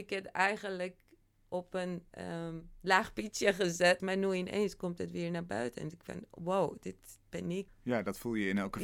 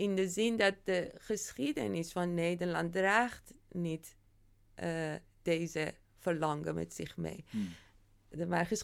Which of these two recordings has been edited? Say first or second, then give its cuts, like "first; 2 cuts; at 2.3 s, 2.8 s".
first; 3 cuts; at 2.1 s, 4.0 s, 7.7 s